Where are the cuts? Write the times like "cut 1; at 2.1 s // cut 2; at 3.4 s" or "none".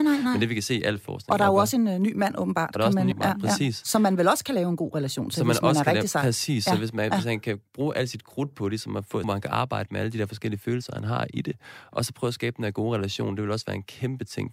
cut 1; at 3.1 s // cut 2; at 9.2 s